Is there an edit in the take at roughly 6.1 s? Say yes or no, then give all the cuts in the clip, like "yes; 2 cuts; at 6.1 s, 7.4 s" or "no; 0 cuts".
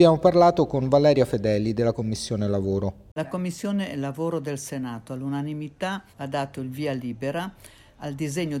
yes; 1 cut; at 6.1 s